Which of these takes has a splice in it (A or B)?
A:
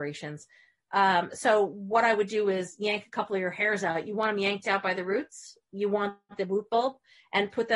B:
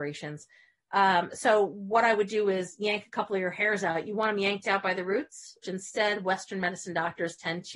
B